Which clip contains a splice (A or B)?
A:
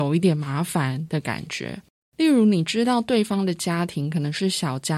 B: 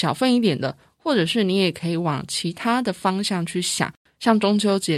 A